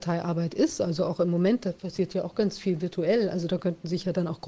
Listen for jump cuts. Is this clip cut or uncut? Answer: uncut